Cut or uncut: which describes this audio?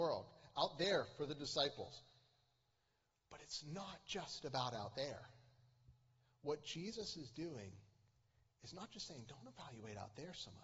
uncut